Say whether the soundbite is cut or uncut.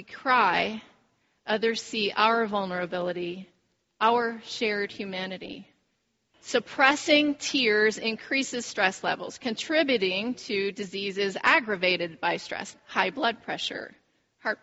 cut